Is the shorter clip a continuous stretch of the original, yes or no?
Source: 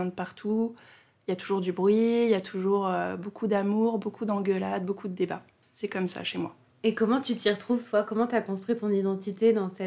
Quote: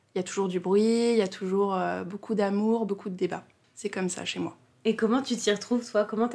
no